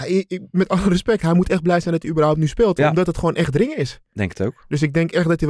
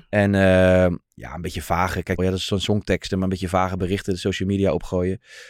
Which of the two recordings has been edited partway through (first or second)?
second